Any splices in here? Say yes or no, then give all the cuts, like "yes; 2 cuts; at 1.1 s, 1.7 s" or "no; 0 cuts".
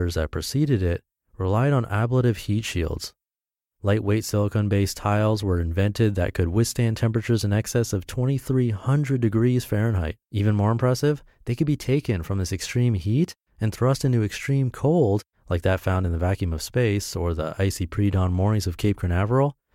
yes; 2 cuts; at 3.7 s, 10.2 s